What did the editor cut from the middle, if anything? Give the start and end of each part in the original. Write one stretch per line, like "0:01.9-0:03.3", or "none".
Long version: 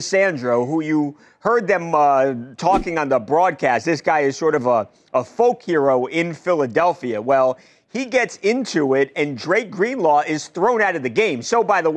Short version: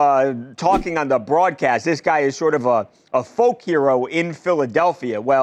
none